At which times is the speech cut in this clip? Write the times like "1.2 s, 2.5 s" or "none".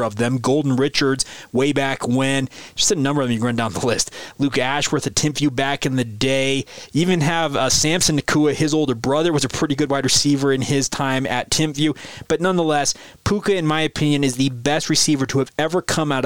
none